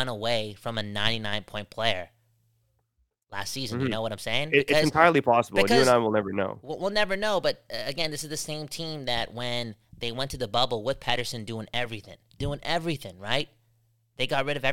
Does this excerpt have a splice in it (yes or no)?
no